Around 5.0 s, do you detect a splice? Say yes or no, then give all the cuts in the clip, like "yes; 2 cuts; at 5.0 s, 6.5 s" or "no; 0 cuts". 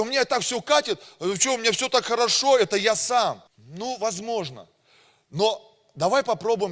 no; 1 cut; at 3.5 s